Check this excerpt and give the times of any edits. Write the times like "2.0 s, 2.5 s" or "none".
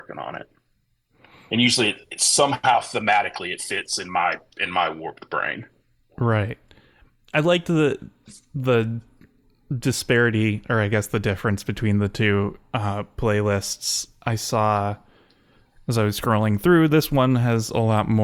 none